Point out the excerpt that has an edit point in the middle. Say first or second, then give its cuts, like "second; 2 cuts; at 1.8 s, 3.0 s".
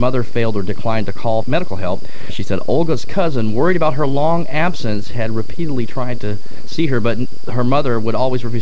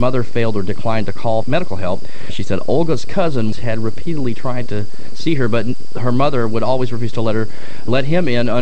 second; 1 cut; at 3.5 s